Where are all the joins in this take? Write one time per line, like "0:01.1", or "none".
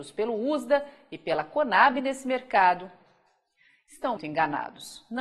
0:04.2